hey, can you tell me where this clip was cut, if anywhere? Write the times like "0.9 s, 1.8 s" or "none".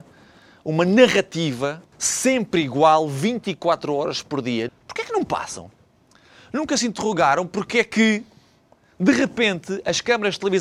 1.9 s, 4.7 s